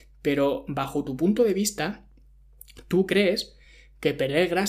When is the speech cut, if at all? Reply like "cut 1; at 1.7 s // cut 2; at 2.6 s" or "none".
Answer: none